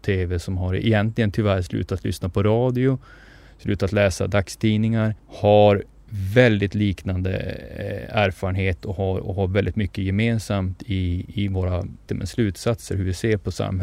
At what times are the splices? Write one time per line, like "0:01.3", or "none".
0:05.2
0:12.1